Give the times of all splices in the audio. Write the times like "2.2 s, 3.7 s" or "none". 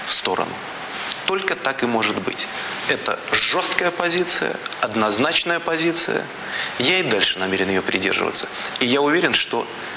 none